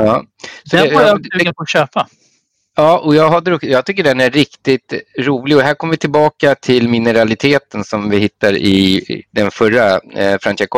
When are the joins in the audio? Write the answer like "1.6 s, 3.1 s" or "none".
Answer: none

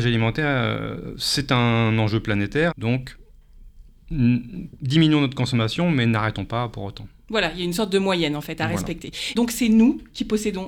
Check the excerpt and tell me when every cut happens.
2.7 s, 9.4 s

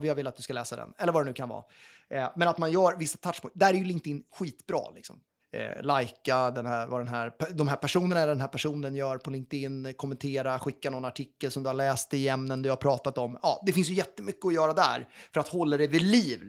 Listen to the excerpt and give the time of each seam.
none

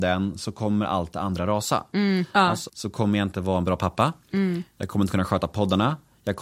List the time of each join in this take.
2.7 s

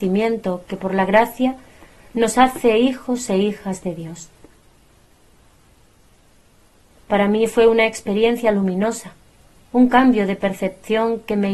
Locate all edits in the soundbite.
none

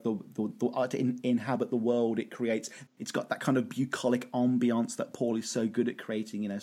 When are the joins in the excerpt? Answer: 2.9 s

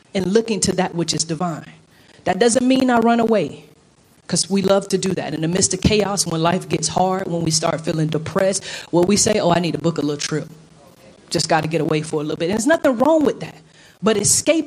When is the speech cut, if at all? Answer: none

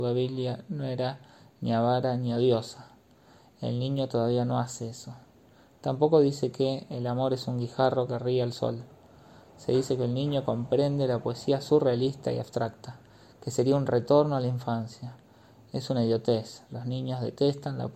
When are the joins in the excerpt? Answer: none

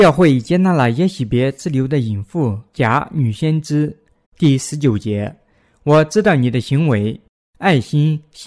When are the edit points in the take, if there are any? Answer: 4.2 s

